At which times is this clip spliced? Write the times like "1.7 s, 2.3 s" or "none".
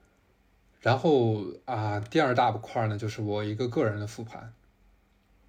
none